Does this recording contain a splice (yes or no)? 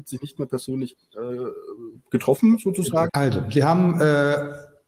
yes